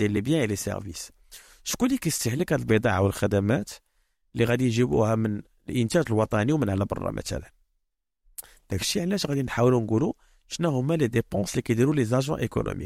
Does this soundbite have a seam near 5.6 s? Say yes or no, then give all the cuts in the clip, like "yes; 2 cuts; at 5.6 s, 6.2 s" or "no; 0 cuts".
no; 1 cut; at 8.6 s